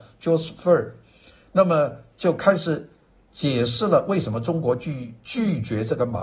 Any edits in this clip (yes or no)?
no